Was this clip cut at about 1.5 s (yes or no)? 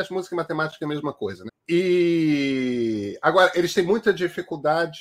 yes